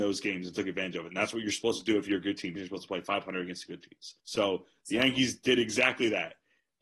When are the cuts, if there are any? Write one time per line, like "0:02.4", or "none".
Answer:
0:02.6
0:04.2